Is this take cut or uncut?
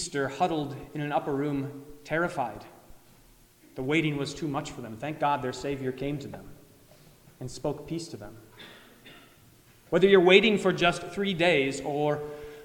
uncut